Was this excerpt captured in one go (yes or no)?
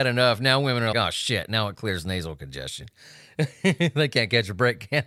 no